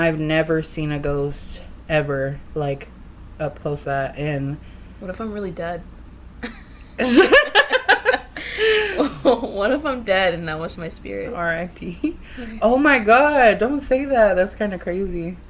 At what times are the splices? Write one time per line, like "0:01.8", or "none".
0:03.8
0:10.8